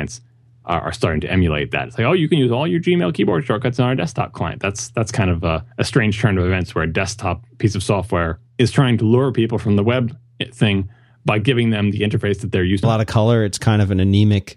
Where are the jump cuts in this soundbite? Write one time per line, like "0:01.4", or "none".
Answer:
0:05.7
0:08.5
0:12.8

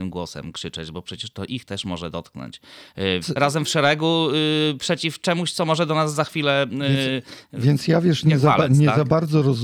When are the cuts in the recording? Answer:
0:03.2

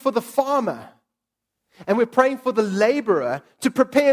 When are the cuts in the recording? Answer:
none

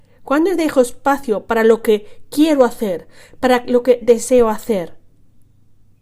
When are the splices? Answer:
0:04.0

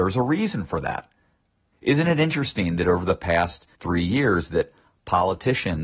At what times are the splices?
0:01.7
0:03.7

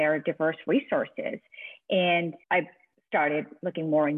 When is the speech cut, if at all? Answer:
0:02.4

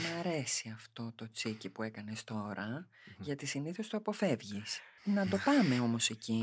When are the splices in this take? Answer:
0:05.0

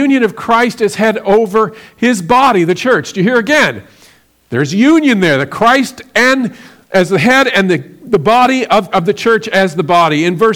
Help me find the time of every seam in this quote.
0:08.9

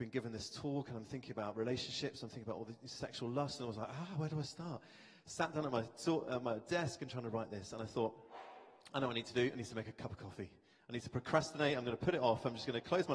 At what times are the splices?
none

